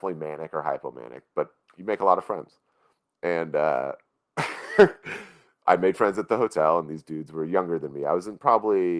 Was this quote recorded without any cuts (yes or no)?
yes